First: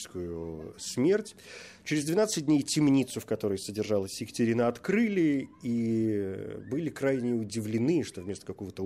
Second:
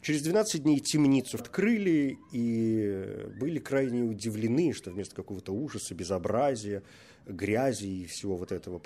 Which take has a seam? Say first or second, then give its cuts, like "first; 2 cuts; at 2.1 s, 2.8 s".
second; 1 cut; at 1.4 s